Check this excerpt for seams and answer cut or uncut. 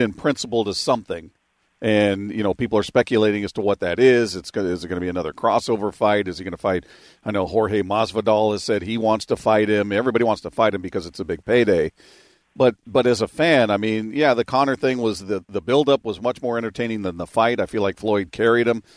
uncut